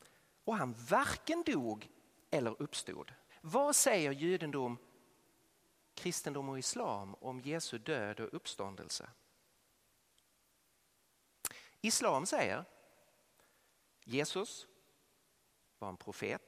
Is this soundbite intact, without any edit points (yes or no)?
no